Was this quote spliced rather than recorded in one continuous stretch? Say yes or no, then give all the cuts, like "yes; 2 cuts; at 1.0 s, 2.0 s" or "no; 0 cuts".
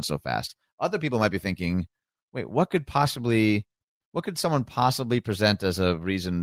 no; 0 cuts